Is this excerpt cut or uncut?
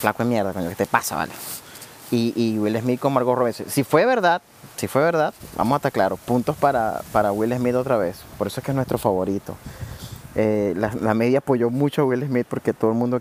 uncut